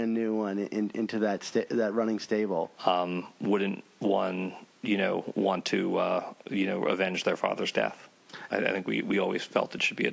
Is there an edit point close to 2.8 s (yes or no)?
yes